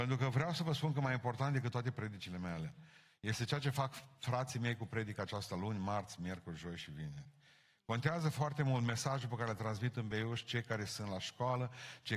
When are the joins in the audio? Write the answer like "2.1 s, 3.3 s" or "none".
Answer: none